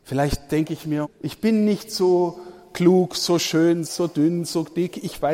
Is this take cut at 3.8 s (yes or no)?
yes